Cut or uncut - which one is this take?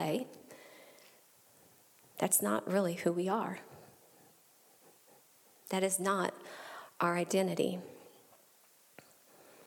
uncut